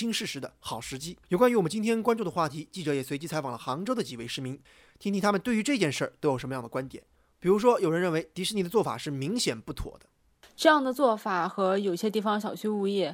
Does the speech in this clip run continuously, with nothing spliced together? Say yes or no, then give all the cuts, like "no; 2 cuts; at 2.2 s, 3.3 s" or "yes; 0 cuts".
no; 1 cut; at 1.2 s